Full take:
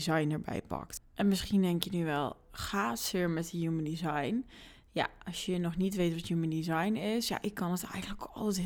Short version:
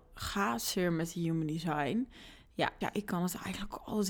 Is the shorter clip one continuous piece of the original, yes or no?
no